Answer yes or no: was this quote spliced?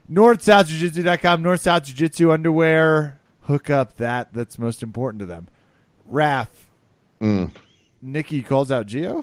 yes